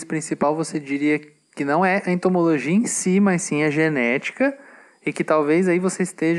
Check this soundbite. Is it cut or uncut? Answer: uncut